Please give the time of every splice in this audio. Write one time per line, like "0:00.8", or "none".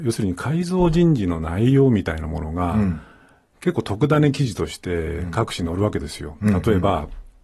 none